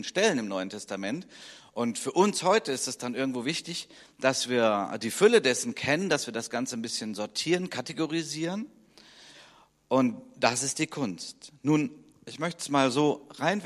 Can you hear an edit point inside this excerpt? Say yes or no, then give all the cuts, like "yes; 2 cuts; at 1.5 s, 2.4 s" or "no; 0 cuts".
no; 0 cuts